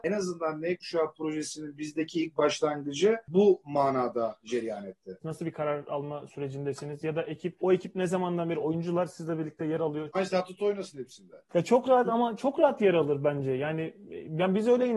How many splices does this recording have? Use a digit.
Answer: 2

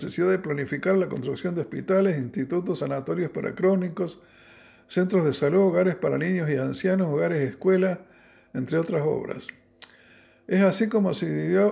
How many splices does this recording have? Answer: 0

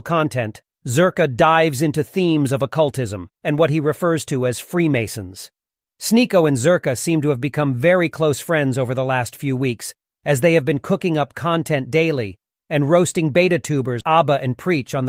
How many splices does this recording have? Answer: 2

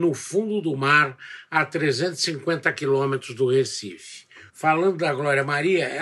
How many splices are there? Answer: 1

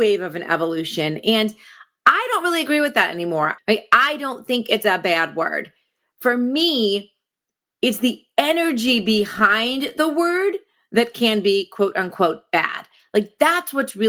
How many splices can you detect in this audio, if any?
1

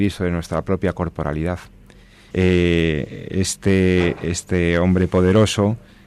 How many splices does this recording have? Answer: 1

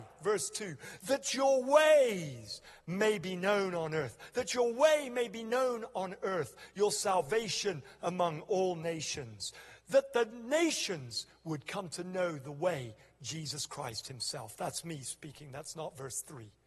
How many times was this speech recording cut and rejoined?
0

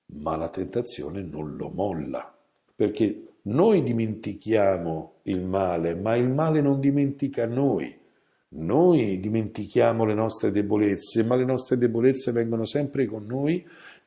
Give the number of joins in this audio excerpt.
1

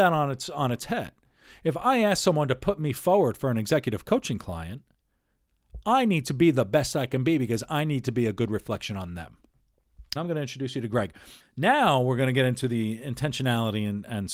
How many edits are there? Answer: 2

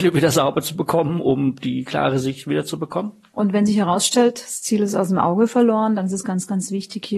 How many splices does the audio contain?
1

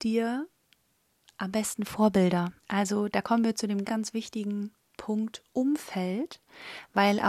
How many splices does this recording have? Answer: 2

